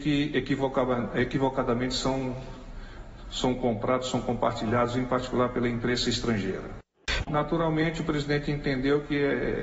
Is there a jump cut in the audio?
yes; 1 cut; at 7.2 s

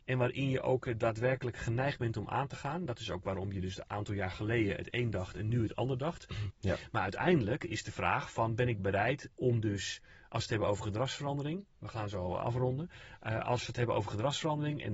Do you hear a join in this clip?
yes; 1 cut; at 6.5 s

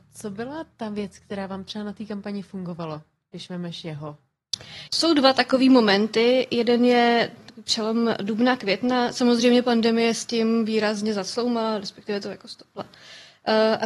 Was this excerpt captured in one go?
no; 1 cut; at 4.9 s

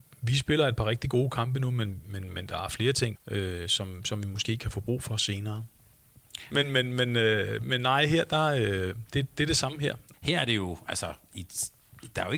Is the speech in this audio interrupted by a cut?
yes; 3 cuts; at 3.1 s, 6.5 s, 10.1 s

